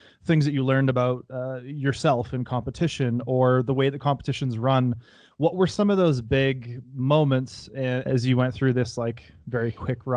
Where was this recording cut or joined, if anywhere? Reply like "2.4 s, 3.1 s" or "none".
8.0 s